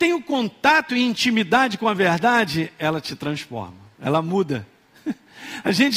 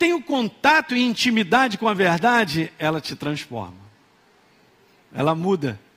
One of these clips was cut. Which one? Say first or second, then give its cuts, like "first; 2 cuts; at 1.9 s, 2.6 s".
first; 1 cut; at 3.9 s